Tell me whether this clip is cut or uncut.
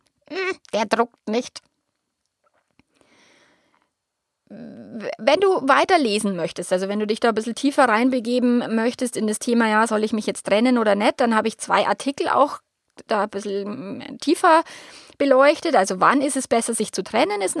uncut